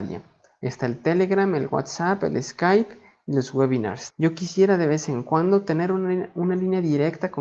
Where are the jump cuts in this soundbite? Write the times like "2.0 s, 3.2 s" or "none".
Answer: 4.1 s